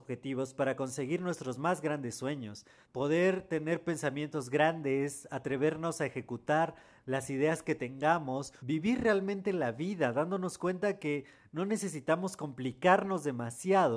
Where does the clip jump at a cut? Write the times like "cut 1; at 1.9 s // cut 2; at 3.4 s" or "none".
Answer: cut 1; at 2.8 s // cut 2; at 8.6 s

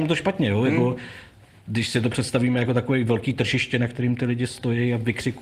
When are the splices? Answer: none

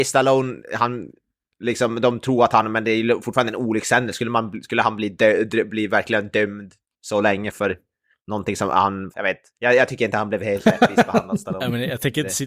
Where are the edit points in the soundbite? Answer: cut 1; at 7.5 s // cut 2; at 9.1 s

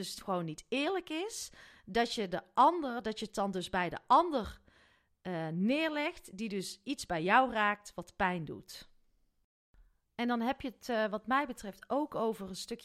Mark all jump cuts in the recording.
none

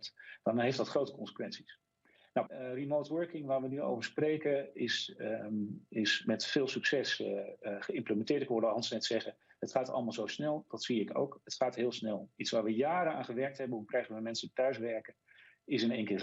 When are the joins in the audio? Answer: cut 1; at 2.5 s

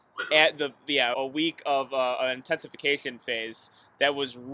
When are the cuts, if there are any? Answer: cut 1; at 1.1 s

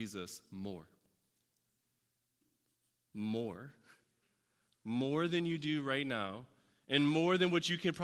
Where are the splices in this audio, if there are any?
none

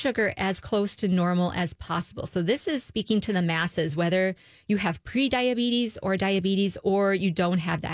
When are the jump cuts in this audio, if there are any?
none

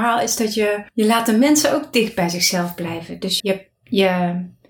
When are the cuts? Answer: cut 1; at 3.4 s

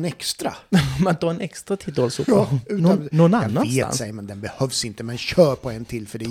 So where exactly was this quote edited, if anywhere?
none

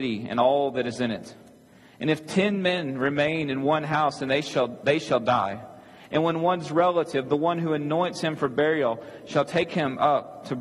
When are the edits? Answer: none

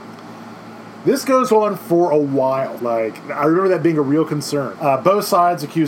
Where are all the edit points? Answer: cut 1; at 2.8 s // cut 2; at 4.7 s

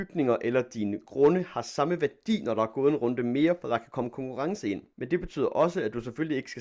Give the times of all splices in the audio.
none

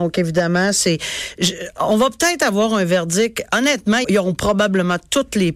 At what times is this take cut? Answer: cut 1; at 4.0 s

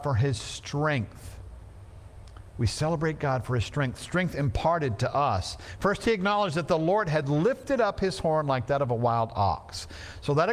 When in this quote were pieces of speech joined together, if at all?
none

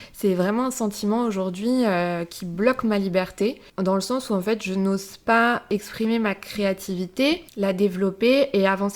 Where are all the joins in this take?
cut 1; at 3.7 s // cut 2; at 7.5 s

